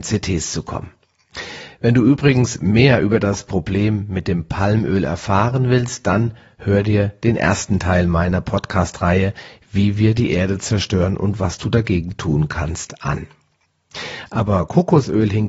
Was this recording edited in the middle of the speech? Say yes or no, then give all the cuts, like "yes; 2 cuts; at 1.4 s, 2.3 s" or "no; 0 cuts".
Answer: no; 0 cuts